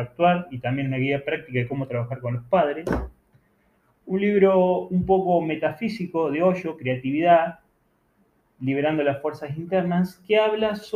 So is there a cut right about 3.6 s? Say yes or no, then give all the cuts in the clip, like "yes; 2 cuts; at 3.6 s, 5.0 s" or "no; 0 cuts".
no; 0 cuts